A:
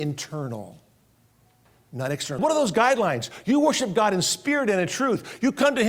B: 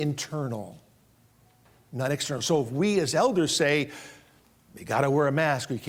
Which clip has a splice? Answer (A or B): A